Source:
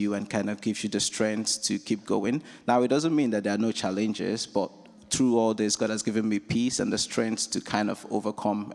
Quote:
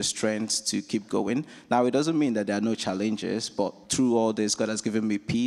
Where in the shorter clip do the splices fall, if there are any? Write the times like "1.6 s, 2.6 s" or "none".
3.8 s

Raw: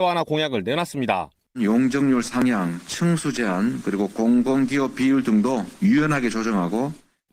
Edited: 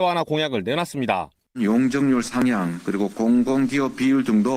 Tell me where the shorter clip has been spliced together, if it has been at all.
2.8 s

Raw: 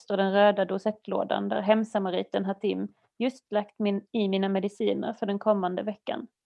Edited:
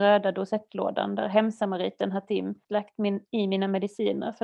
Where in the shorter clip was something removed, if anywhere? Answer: 2.6 s

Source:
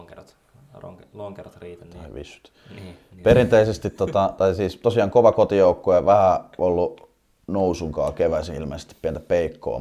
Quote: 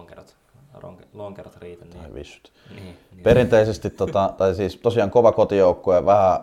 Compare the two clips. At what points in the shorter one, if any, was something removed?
none

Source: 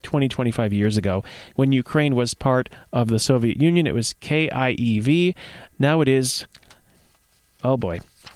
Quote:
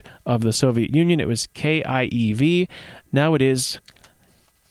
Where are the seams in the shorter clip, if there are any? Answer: none

